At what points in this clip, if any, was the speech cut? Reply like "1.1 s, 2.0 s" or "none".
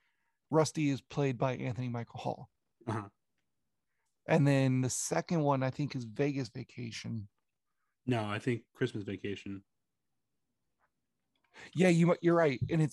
none